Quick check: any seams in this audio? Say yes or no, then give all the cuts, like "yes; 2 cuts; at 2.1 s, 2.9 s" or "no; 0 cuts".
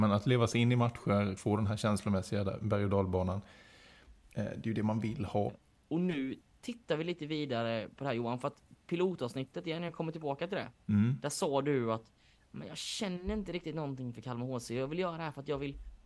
yes; 2 cuts; at 1.4 s, 5.5 s